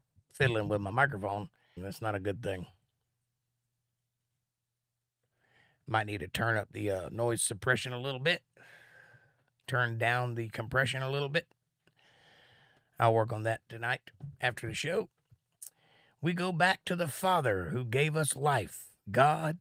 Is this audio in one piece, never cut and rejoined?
no; 1 cut; at 1.8 s

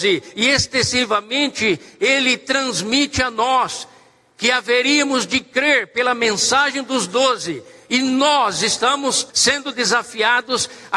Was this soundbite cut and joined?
yes; 1 cut; at 9.3 s

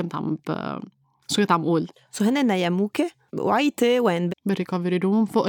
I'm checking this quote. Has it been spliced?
yes; 2 cuts; at 3.3 s, 4.3 s

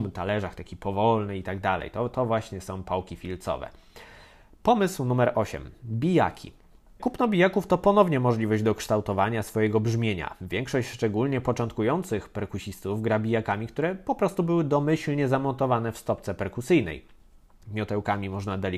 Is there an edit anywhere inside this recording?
yes; 2 cuts; at 7.0 s, 17.6 s

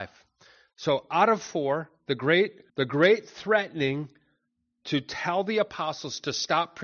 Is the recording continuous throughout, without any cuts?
no; 1 cut; at 2.7 s

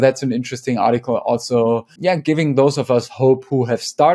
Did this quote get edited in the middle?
yes; 1 cut; at 2.0 s

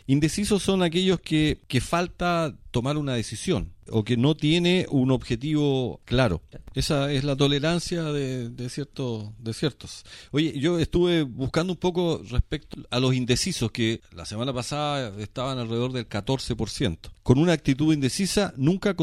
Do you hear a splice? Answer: yes; 2 cuts; at 6.5 s, 17.2 s

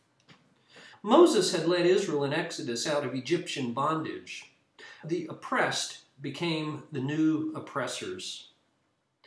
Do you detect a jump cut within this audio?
yes; 2 cuts; at 0.9 s, 5.0 s

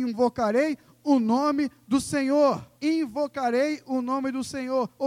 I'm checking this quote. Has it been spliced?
yes; 1 cut; at 2.8 s

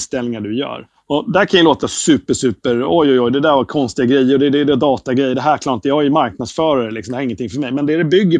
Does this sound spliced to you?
no; 0 cuts

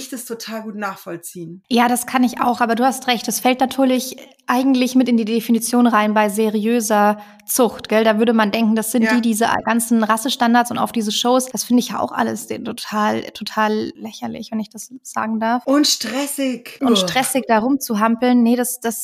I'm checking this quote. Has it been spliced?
no; 0 cuts

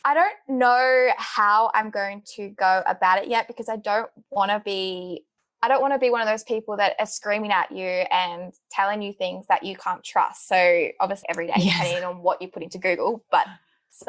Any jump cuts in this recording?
yes; 1 cut; at 11.2 s

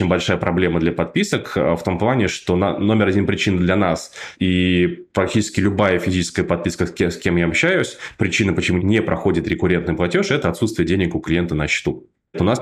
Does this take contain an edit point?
no; 0 cuts

